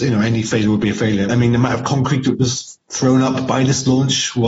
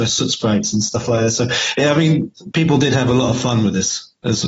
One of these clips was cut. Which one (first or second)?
first